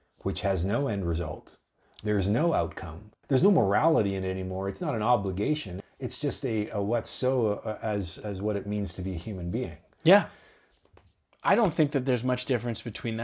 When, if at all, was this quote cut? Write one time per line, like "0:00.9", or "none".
0:03.1